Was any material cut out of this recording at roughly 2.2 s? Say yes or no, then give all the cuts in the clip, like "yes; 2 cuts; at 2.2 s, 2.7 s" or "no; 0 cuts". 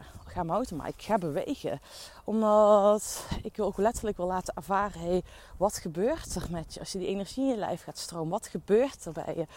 no; 0 cuts